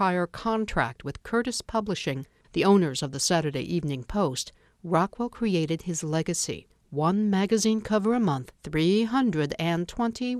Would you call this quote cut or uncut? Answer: cut